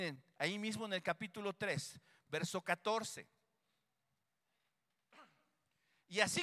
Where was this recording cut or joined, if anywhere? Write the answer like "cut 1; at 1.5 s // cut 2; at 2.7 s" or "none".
cut 1; at 2.3 s